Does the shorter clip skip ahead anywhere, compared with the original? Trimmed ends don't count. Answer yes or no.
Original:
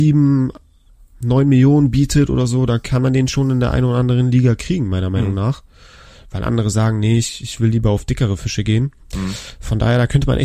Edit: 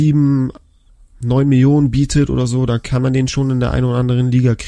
no